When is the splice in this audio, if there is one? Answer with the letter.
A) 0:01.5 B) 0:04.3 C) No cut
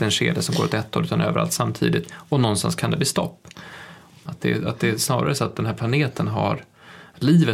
B